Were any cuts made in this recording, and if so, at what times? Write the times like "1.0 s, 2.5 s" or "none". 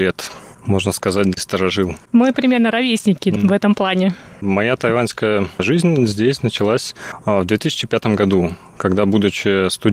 none